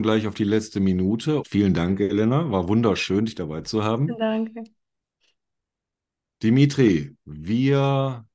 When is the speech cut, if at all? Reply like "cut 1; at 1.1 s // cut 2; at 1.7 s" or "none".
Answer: cut 1; at 1.4 s // cut 2; at 7.2 s